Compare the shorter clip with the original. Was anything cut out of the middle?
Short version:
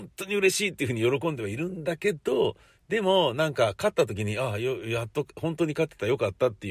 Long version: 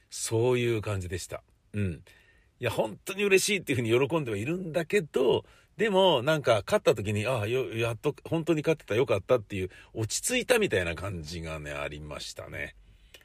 no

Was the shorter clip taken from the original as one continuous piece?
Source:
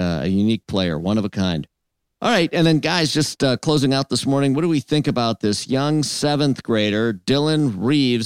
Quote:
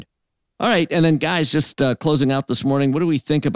yes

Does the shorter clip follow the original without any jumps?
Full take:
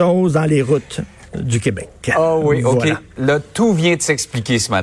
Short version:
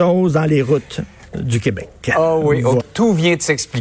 no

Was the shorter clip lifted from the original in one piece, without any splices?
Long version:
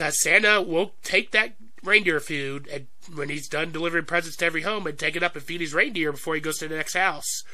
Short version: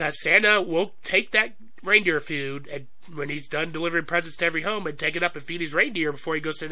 yes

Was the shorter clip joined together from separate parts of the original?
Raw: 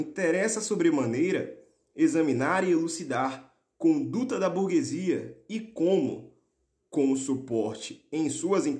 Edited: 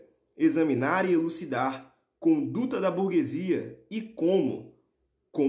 no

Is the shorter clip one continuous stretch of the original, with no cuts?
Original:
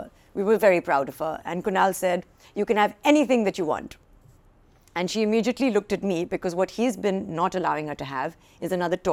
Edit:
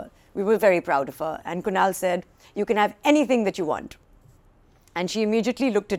yes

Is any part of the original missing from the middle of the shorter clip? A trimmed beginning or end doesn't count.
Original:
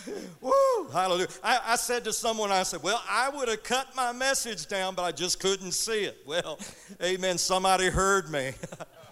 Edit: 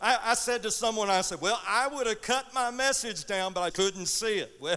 yes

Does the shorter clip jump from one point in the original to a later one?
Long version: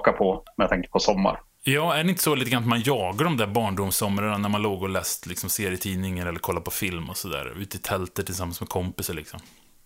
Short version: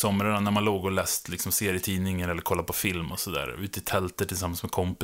no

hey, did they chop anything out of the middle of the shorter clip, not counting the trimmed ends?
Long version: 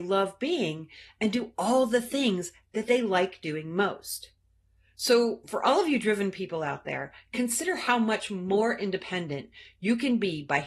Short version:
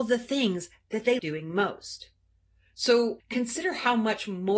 yes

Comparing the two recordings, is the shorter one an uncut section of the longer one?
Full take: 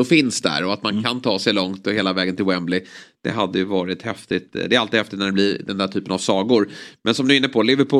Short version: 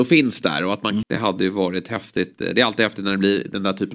no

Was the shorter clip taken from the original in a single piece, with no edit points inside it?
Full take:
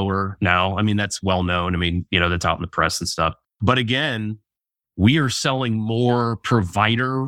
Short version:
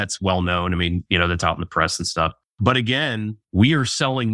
no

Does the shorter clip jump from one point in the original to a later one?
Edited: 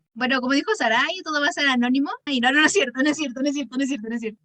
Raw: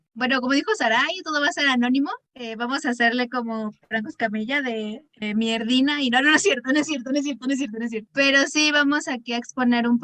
yes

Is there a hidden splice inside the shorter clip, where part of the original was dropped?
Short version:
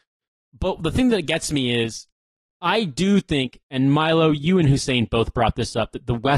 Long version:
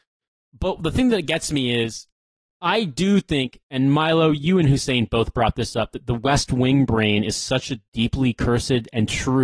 no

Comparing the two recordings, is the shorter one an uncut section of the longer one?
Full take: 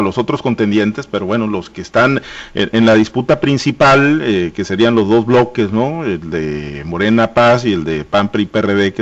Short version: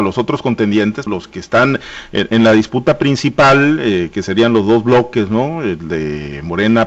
no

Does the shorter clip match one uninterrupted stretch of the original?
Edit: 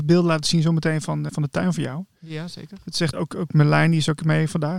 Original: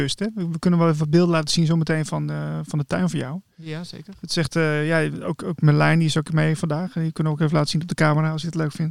no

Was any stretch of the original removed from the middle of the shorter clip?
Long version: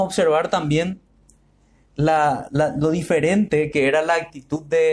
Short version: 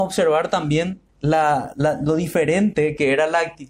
yes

